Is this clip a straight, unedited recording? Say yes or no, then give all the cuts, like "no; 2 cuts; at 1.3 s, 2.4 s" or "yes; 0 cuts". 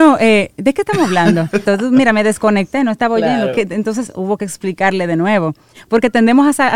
no; 1 cut; at 1.7 s